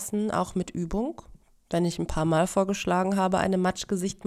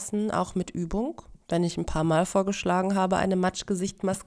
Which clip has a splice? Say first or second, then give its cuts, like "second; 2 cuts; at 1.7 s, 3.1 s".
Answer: second; 1 cut; at 1.4 s